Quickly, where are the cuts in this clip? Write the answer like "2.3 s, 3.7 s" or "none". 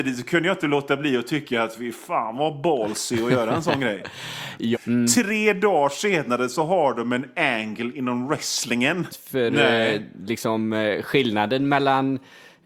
4.7 s, 9.1 s